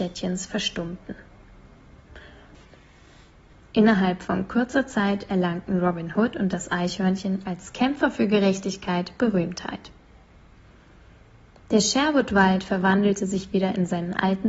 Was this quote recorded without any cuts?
no; 1 cut; at 3.5 s

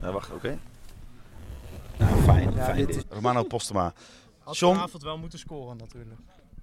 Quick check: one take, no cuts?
no; 2 cuts; at 2.0 s, 3.0 s

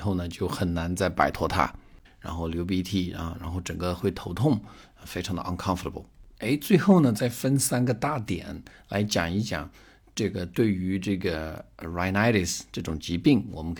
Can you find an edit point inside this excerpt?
yes; 1 cut; at 2.0 s

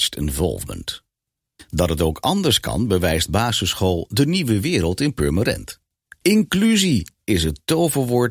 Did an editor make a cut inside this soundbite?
yes; 1 cut; at 6.2 s

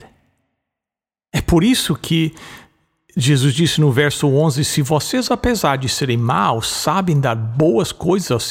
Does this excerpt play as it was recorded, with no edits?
yes; 0 cuts

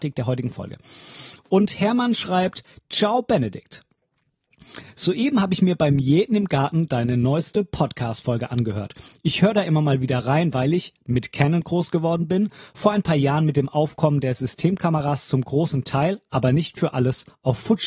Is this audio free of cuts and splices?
yes; 0 cuts

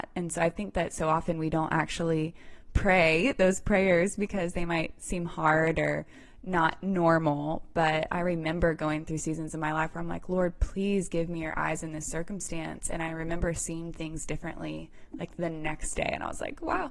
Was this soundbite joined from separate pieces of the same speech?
no; 0 cuts

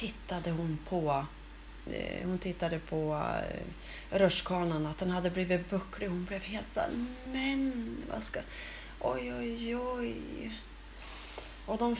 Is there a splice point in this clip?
no; 0 cuts

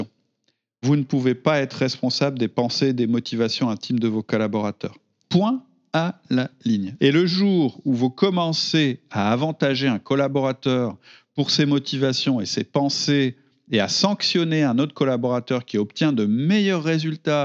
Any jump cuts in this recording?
yes; 2 cuts; at 5.2 s, 7.0 s

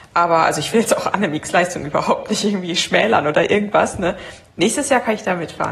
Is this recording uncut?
no; 1 cut; at 4.5 s

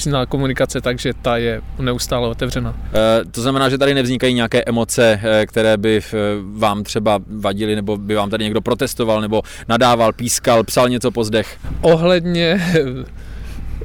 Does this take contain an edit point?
no; 0 cuts

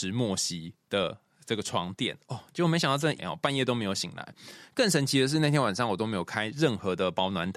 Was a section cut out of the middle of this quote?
yes; 1 cut; at 3.2 s

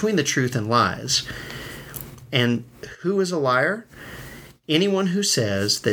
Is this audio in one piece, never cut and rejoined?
yes; 0 cuts

